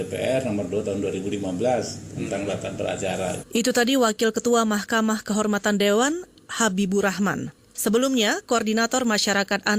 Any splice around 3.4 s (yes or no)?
yes